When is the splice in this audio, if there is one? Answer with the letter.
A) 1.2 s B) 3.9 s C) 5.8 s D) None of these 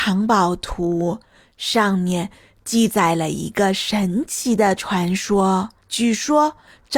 C